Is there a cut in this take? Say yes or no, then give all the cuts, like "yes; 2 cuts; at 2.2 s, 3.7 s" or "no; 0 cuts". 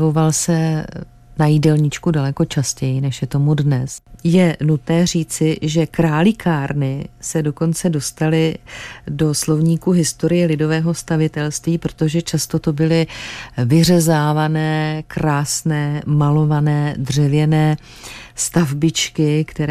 no; 0 cuts